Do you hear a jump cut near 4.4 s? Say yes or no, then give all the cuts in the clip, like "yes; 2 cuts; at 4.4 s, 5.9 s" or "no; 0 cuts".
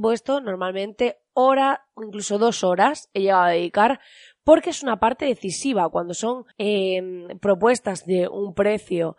no; 1 cut; at 6.5 s